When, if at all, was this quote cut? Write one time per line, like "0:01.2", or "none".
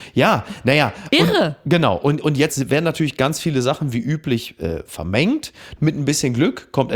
0:05.8